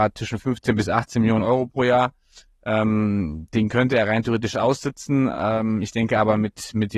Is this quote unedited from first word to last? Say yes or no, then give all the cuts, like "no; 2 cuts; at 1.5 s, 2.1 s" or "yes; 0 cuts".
yes; 0 cuts